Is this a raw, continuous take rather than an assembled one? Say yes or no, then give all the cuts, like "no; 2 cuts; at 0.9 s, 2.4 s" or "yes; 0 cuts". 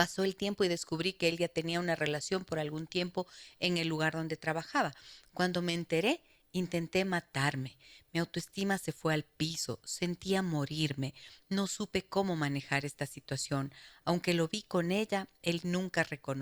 yes; 0 cuts